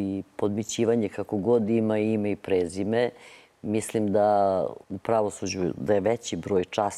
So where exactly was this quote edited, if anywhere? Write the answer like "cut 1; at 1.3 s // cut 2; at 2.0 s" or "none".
cut 1; at 4.8 s